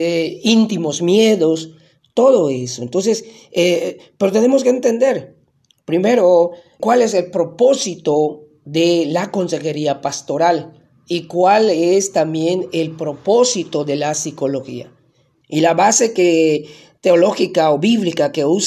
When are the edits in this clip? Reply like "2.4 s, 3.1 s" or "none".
6.8 s, 15.4 s